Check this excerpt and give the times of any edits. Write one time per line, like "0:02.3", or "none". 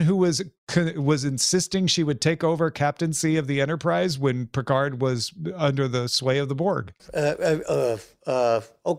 0:07.0

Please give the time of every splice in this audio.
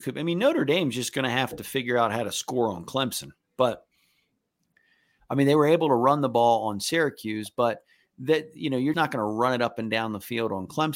0:08.9

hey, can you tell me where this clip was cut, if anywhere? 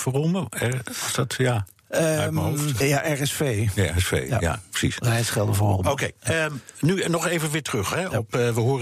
0:02.8

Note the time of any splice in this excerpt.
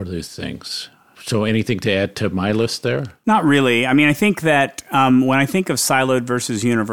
0:03.2

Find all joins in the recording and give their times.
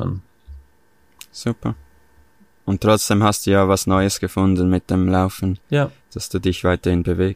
none

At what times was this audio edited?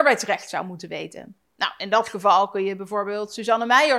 none

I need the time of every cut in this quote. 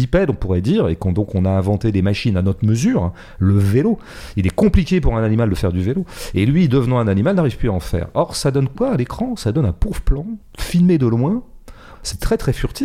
0:10.5
0:11.9

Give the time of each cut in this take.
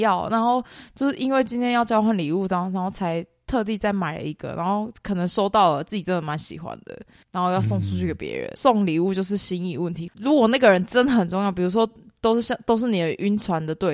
0:08.6
0:10.1

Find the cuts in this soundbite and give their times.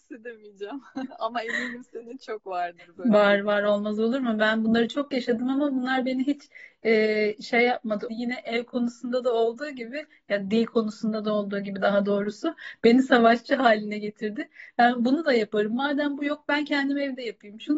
0:08.1

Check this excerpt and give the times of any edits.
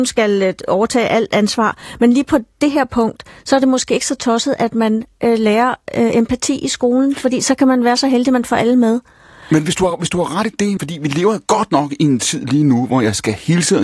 0:10.8

